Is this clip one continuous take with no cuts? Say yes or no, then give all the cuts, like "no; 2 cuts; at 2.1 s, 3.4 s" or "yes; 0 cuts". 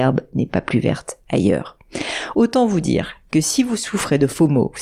yes; 0 cuts